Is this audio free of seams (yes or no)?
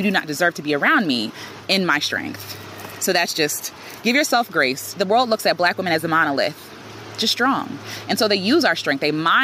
no